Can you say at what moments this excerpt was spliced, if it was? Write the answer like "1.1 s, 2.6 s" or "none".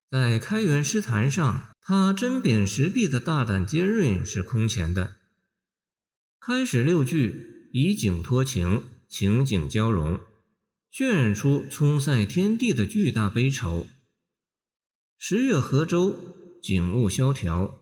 1.7 s